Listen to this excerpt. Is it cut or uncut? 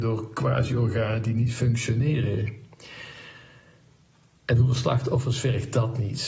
uncut